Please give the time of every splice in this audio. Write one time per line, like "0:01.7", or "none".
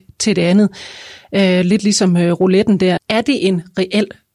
0:03.0